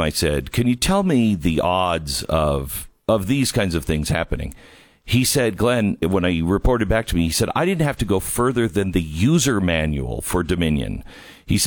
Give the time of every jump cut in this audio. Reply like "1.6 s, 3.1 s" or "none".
6.0 s